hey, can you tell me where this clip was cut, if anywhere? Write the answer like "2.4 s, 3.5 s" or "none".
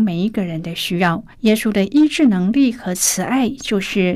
1.3 s